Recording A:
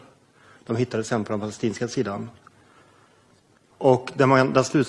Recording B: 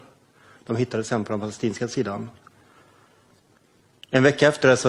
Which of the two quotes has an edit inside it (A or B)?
A